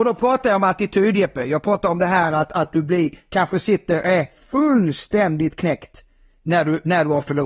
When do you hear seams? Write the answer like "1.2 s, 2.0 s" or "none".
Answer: none